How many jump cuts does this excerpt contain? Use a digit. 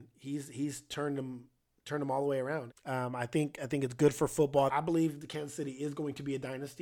2